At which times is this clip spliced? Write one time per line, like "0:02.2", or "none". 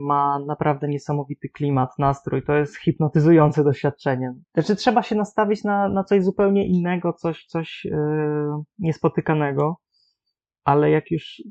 0:04.4